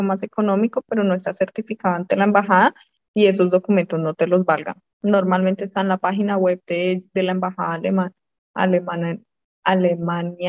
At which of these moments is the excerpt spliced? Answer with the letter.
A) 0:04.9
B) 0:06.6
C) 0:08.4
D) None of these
A